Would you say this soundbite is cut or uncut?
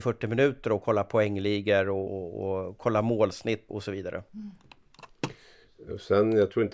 cut